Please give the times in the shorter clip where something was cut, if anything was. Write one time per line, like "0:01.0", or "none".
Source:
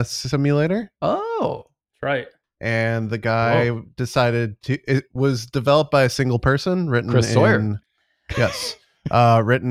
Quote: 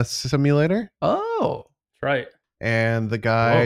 none